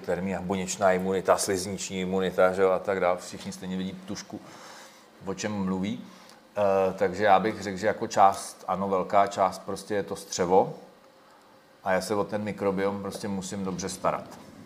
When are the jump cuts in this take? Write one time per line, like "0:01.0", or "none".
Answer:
none